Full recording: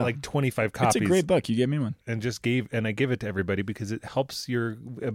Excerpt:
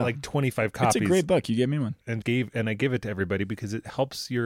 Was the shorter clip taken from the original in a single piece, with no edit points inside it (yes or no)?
no